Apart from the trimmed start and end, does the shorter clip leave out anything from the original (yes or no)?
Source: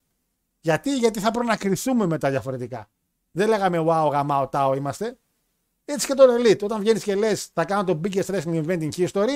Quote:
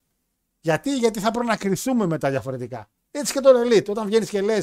yes